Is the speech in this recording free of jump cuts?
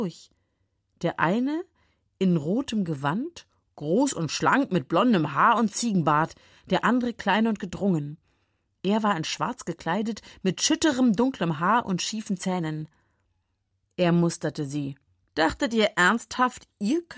no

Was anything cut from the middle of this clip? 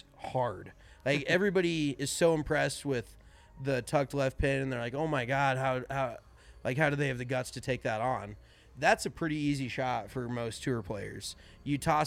no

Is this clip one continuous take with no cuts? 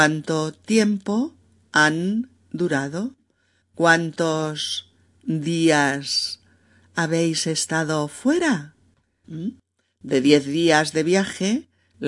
no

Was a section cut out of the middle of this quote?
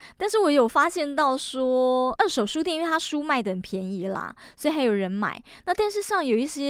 yes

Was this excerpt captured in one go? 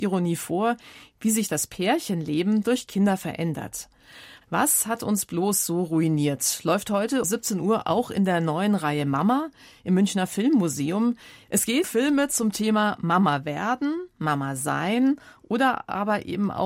no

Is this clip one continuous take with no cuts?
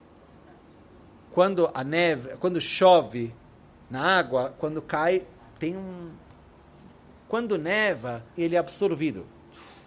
no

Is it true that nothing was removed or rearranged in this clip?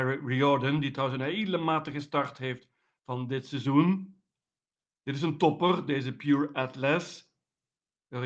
yes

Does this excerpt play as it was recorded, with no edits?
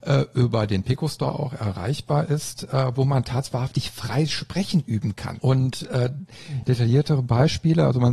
no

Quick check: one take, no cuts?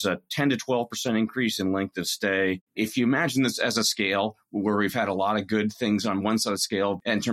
no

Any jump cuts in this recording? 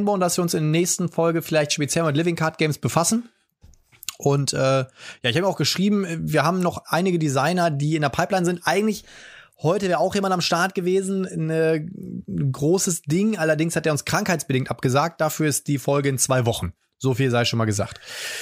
no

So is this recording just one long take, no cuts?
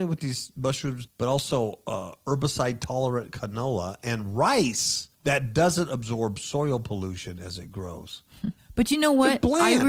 no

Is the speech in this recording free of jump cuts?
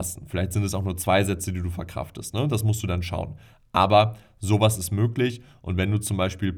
yes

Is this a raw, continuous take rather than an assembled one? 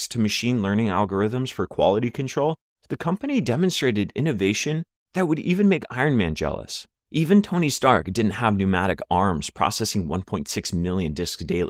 yes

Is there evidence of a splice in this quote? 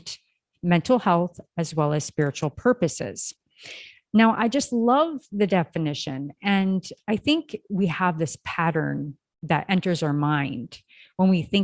no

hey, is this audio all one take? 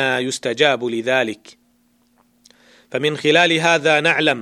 yes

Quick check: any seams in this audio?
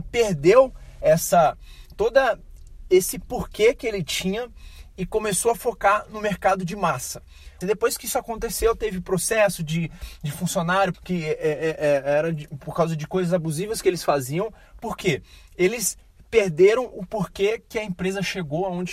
yes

